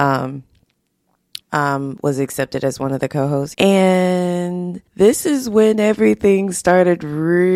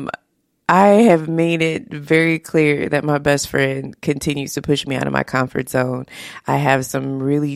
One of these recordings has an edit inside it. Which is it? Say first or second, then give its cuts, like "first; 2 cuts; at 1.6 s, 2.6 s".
first; 3 cuts; at 1.4 s, 3.5 s, 4.9 s